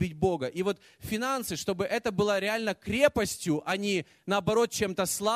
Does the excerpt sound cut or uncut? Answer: uncut